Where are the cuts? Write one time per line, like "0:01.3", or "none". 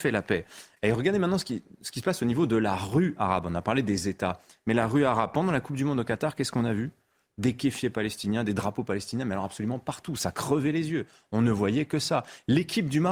none